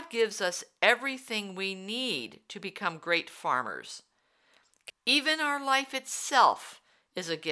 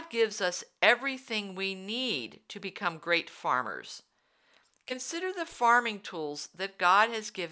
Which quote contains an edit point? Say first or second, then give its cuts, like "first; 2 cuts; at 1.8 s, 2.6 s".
first; 1 cut; at 4.9 s